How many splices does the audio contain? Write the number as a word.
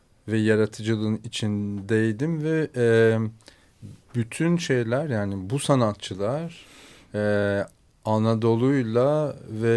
zero